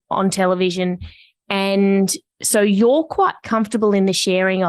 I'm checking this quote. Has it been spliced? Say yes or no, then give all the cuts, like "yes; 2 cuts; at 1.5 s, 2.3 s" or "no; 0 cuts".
no; 0 cuts